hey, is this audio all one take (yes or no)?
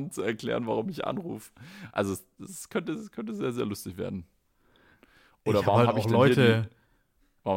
yes